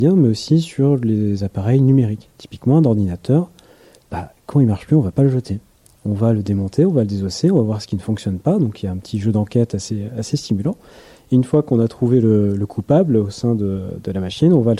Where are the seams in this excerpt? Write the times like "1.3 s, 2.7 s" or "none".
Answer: none